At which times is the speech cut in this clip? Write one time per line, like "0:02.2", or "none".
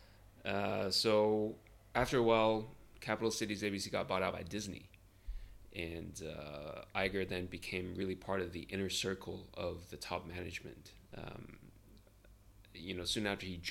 0:11.1